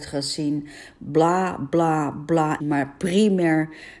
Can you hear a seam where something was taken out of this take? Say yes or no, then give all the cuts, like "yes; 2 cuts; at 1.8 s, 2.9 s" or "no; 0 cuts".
yes; 2 cuts; at 1.0 s, 2.6 s